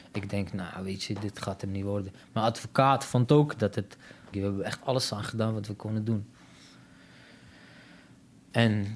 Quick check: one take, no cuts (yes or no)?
no